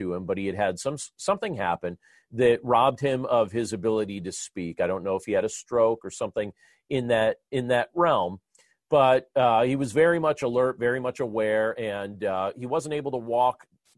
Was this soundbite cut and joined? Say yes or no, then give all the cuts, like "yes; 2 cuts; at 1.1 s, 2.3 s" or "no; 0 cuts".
no; 0 cuts